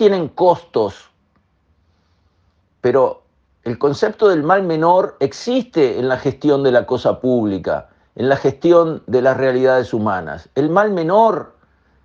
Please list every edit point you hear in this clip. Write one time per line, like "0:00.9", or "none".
none